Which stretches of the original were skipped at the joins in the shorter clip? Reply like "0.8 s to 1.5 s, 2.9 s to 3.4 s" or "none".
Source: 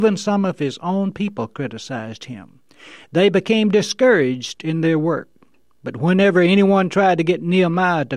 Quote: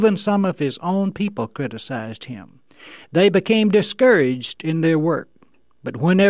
none

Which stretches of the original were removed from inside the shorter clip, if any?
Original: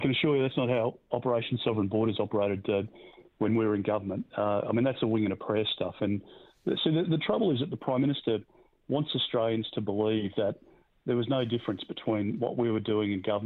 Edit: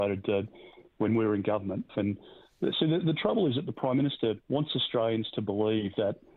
4.3 s to 5.9 s, 8.5 s to 8.8 s

